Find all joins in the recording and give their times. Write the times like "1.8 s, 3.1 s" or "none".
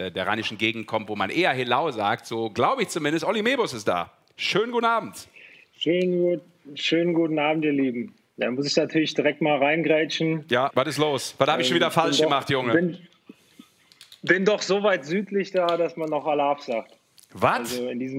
10.7 s